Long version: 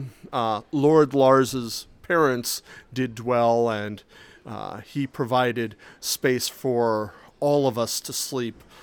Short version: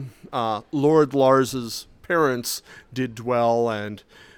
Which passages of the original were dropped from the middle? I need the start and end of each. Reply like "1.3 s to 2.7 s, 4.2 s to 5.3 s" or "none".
none

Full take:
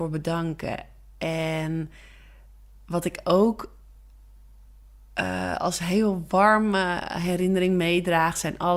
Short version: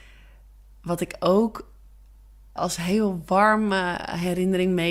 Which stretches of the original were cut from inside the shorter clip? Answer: 4.6 s to 5.6 s

